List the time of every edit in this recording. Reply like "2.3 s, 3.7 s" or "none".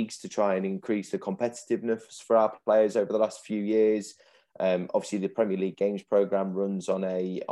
none